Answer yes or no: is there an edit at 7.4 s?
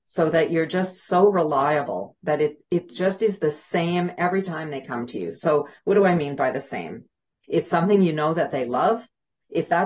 yes